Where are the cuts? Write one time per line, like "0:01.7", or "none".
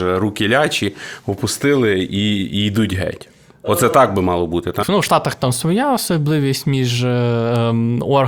0:04.8